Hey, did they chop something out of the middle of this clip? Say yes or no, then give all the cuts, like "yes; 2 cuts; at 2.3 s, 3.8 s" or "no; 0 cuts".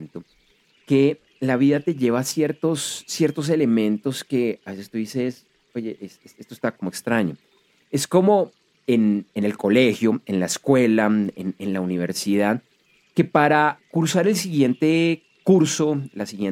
yes; 1 cut; at 6.7 s